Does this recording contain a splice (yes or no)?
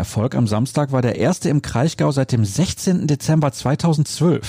no